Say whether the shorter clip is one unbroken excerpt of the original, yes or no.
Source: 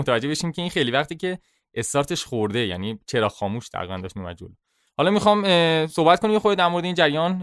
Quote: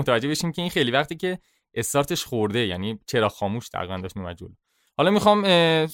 yes